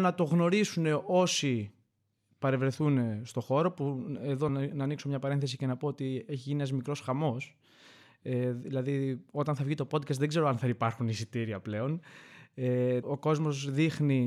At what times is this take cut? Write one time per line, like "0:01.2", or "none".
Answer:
0:04.5
0:13.0